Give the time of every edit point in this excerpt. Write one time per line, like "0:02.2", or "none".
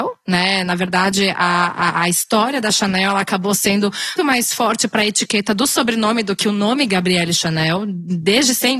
0:04.2